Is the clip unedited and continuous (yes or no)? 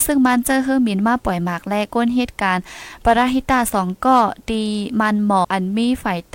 no